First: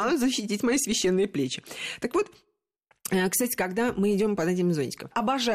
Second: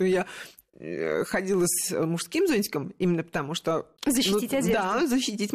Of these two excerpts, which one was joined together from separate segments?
second; 1 cut; at 4.0 s

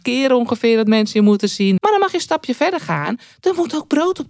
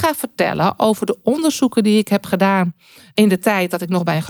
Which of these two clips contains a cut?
first; 1 cut; at 1.8 s

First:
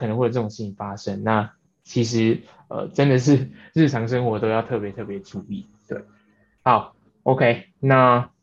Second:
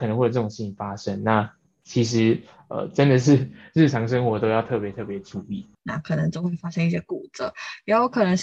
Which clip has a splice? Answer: second; 1 cut; at 5.7 s

